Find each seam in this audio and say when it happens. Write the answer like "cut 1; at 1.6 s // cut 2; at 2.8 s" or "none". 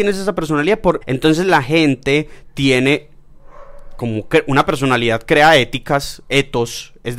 cut 1; at 1.0 s